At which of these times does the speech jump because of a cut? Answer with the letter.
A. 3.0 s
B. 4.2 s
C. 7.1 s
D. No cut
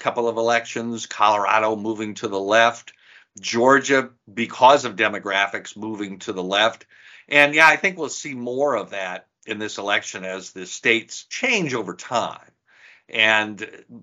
D